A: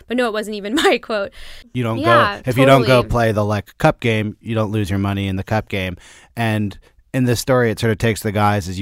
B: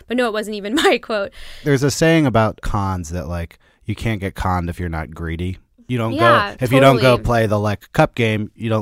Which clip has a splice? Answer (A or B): A